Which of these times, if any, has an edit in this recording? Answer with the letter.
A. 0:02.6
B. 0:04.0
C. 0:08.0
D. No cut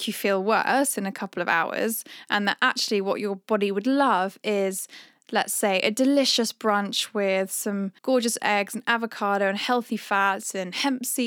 C